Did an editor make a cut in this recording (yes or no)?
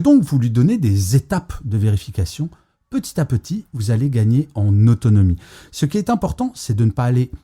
no